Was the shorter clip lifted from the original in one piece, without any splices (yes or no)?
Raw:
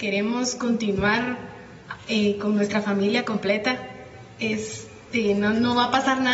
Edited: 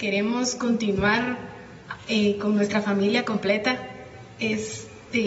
yes